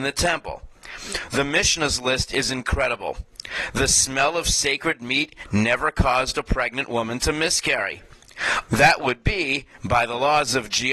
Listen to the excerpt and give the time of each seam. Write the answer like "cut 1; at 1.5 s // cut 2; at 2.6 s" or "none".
cut 1; at 8.7 s